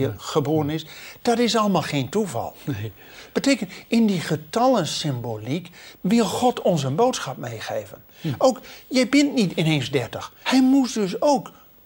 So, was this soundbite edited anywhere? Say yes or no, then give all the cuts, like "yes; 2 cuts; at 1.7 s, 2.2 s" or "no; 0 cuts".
yes; 3 cuts; at 5.9 s, 8.1 s, 10.4 s